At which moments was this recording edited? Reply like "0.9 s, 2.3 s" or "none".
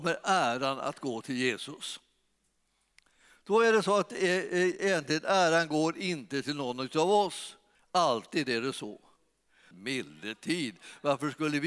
7.7 s, 9.7 s